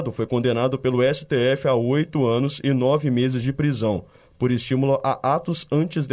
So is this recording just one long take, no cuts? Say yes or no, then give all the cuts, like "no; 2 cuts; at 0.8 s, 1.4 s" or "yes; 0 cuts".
yes; 0 cuts